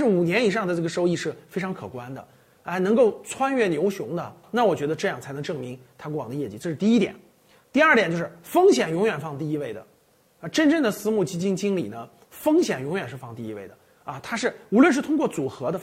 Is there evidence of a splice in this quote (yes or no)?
no